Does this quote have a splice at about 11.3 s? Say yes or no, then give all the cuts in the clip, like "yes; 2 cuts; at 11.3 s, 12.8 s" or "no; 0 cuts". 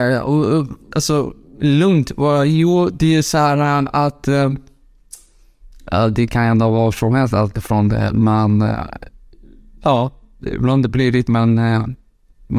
yes; 2 cuts; at 0.9 s, 11.3 s